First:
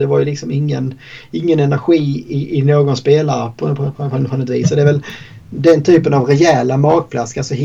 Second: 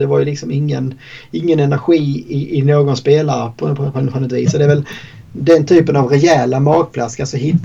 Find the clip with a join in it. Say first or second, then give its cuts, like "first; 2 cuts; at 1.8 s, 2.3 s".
second; 1 cut; at 3.9 s